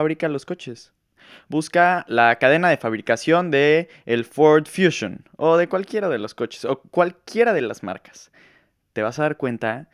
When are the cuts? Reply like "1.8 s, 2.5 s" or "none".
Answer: none